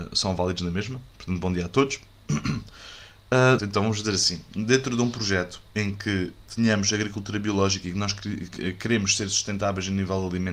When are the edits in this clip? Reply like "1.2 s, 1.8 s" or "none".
3.6 s